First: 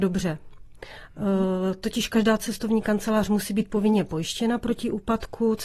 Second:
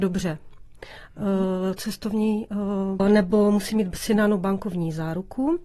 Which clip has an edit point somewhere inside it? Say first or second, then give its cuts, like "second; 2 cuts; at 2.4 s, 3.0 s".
second; 2 cuts; at 1.8 s, 3.0 s